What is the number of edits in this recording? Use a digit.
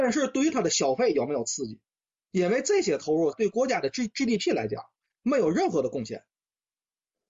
2